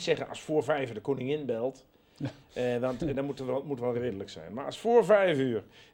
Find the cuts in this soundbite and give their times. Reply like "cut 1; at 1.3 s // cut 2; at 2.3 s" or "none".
none